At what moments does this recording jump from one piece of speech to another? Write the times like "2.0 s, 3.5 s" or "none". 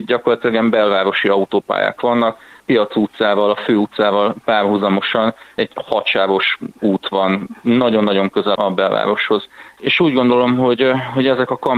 8.6 s, 9.8 s